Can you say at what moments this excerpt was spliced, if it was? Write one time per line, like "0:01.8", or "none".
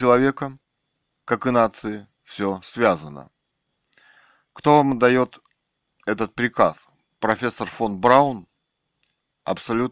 none